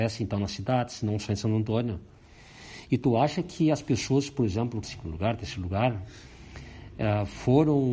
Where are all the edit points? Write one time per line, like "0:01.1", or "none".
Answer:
0:04.8

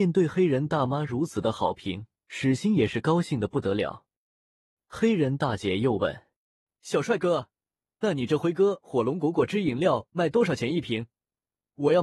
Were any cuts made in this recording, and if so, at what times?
0:02.2

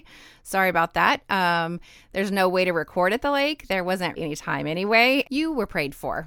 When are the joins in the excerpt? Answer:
0:04.2
0:05.2

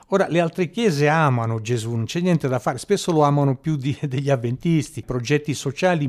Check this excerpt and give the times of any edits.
0:05.0

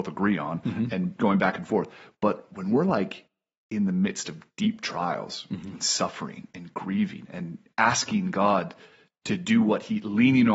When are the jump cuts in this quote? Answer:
none

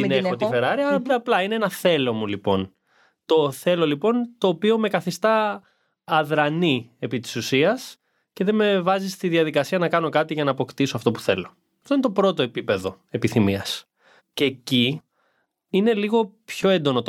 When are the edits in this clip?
0:14.2

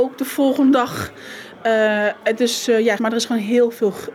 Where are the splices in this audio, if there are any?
0:03.0

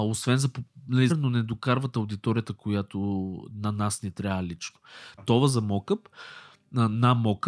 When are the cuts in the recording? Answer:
0:01.1
0:05.2

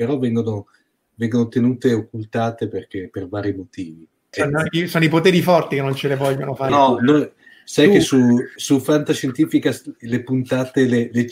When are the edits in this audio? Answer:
0:04.3
0:06.7
0:08.6

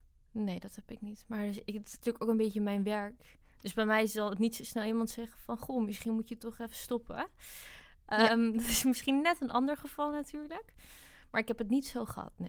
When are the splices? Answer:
none

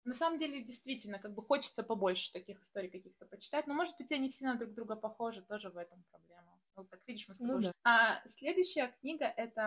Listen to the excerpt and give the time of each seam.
0:07.7

